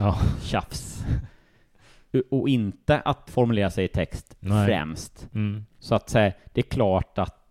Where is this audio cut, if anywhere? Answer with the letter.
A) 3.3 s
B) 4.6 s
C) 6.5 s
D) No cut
A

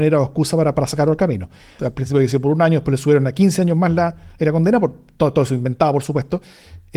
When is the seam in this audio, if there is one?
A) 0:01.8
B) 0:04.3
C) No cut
A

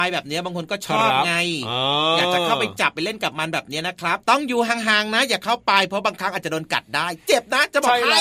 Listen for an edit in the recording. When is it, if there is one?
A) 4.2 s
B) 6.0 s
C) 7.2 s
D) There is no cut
A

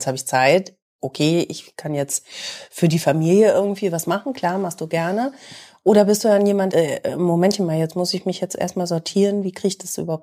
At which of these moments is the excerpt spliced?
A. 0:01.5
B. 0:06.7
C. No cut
B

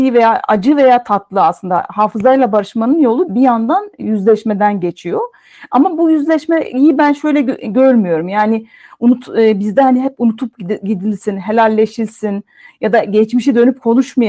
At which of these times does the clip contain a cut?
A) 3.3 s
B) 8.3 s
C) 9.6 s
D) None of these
A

